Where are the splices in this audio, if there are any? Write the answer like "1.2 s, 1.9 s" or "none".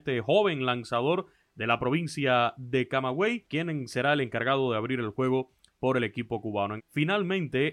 6.8 s